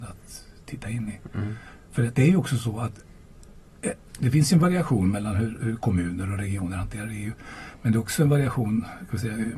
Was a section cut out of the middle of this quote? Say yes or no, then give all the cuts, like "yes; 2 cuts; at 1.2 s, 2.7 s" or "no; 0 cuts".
no; 0 cuts